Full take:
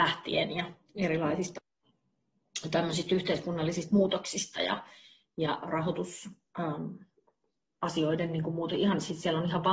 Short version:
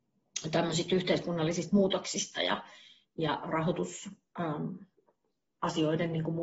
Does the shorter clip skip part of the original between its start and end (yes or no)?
no